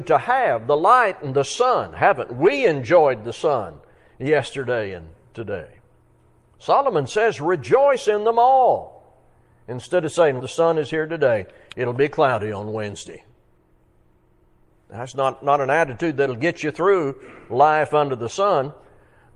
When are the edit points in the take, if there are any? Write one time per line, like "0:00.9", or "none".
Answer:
0:10.4